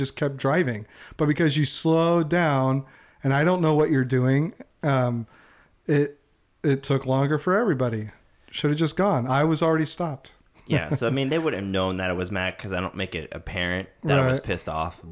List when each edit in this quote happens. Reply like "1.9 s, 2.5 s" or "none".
none